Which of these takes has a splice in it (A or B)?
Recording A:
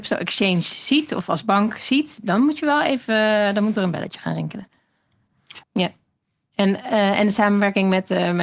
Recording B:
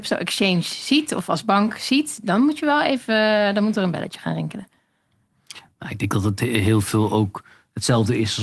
A